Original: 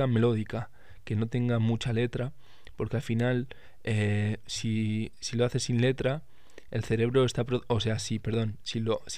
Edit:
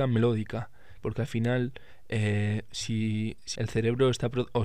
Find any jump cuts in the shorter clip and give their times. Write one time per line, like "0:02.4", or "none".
0:01.0
0:03.6